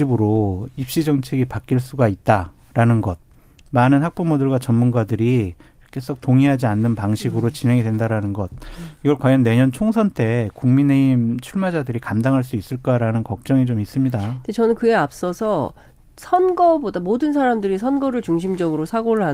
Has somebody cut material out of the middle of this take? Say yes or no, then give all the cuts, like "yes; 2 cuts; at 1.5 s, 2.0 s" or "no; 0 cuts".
no; 0 cuts